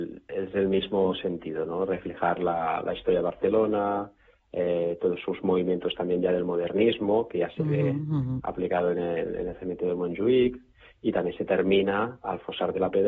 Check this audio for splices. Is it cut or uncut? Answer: uncut